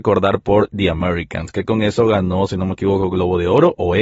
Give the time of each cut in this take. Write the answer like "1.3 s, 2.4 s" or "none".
none